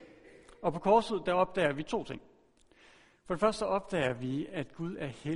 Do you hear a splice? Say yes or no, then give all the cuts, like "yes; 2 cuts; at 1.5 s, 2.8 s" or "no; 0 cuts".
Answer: no; 0 cuts